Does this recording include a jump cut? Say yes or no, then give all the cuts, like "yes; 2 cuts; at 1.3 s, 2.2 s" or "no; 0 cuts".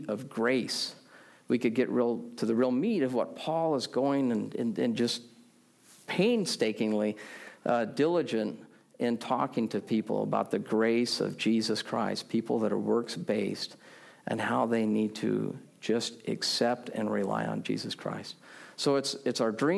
no; 0 cuts